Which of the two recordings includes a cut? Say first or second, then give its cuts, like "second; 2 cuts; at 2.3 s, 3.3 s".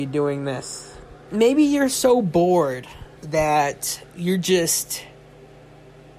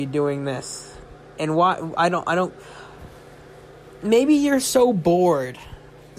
first; 2 cuts; at 1.3 s, 3.2 s